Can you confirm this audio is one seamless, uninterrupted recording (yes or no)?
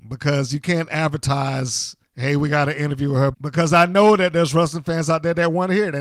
no